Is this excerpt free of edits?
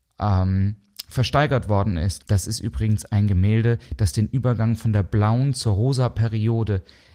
no; 1 cut; at 2.2 s

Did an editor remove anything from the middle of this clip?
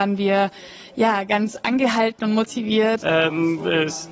yes; 1 cut; at 3.0 s

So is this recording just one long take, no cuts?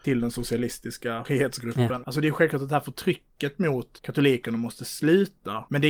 no; 1 cut; at 2.0 s

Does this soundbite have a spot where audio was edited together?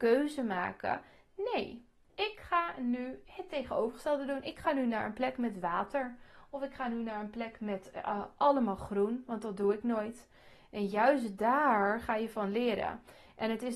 no; 0 cuts

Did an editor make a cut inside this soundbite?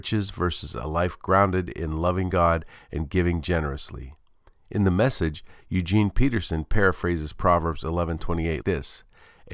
yes; 1 cut; at 8.6 s

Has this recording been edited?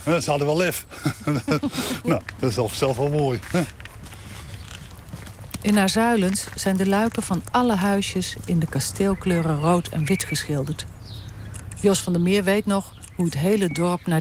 no; 0 cuts

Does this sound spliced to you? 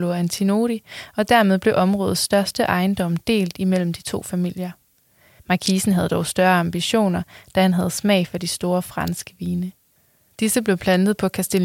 yes; 1 cut; at 5.4 s

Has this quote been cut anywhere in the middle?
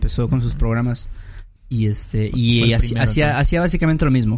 yes; 1 cut; at 1.6 s

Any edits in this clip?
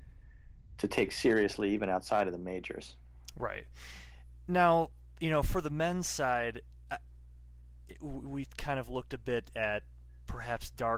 no; 0 cuts

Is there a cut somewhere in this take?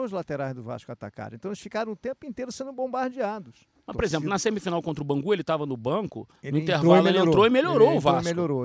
yes; 1 cut; at 3.9 s

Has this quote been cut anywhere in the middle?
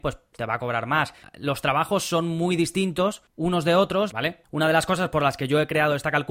yes; 2 cuts; at 1.2 s, 4.1 s

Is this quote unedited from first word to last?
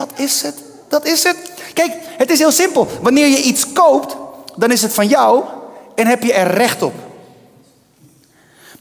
yes; 0 cuts

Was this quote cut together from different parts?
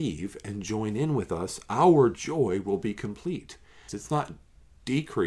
yes; 1 cut; at 3.9 s

